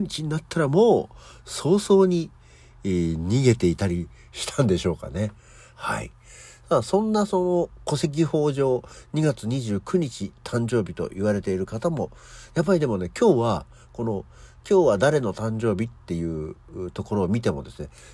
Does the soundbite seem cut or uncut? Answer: uncut